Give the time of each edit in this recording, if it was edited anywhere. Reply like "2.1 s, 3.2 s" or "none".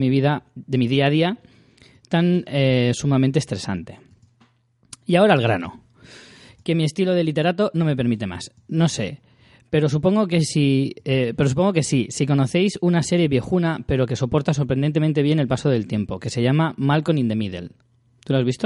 none